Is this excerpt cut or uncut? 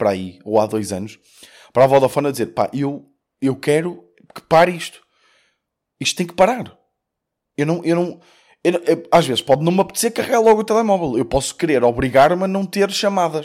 uncut